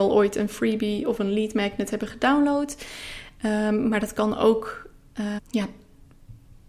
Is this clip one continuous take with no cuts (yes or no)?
no